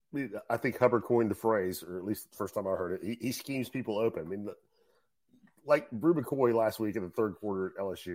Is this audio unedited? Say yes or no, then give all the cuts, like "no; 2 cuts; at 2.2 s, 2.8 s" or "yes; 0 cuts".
yes; 0 cuts